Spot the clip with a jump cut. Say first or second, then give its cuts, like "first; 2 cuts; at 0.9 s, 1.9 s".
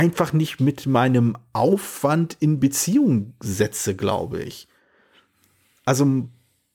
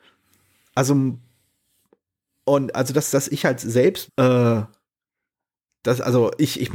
second; 1 cut; at 4.1 s